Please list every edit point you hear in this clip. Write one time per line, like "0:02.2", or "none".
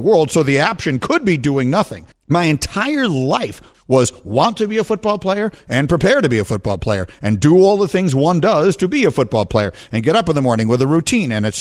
0:02.1
0:03.7